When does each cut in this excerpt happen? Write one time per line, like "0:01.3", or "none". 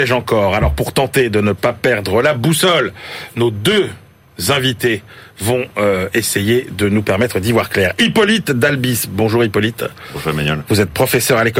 none

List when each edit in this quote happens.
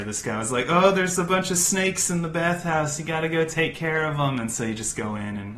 none

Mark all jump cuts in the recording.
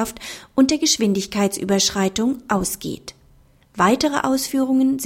none

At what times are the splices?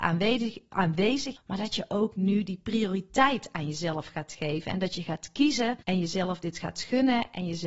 0:01.4
0:05.8

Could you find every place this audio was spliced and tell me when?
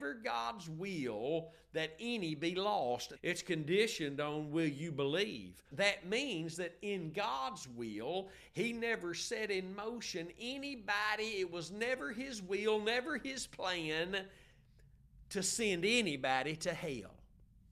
0:03.2
0:05.7

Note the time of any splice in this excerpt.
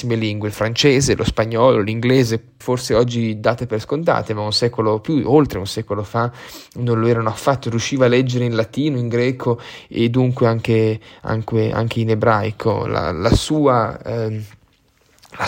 0:02.6

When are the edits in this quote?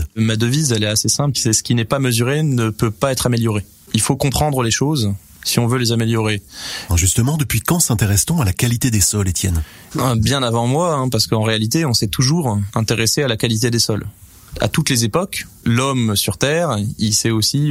0:06.9

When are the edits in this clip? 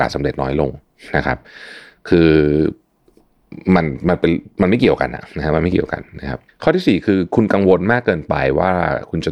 none

